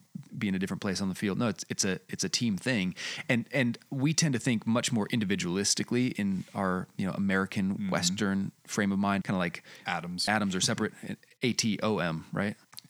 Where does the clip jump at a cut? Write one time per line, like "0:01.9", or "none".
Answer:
0:09.2
0:10.3